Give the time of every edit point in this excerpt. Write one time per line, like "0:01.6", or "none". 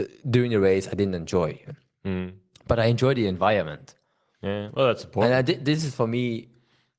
0:01.7